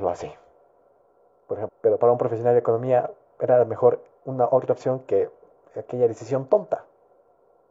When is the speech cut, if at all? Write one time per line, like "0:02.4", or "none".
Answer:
0:01.7